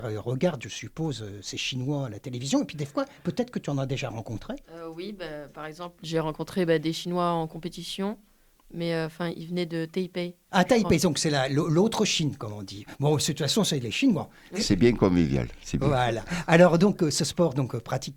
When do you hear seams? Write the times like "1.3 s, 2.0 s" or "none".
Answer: 4.6 s, 6.0 s, 14.5 s